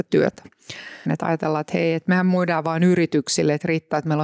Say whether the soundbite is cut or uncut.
cut